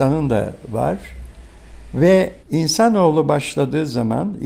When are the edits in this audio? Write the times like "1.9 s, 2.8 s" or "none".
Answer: 2.4 s